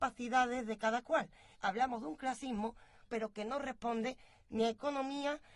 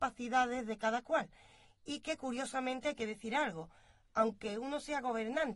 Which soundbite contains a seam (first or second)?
first